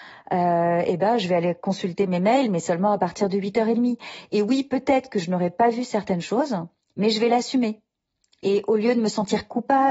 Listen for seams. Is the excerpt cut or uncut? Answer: uncut